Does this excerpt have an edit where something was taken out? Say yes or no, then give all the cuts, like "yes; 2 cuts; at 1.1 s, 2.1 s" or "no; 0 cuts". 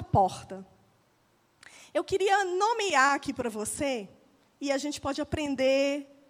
no; 0 cuts